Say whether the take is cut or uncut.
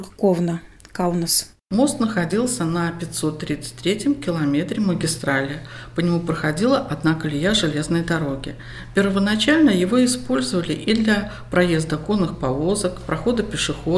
uncut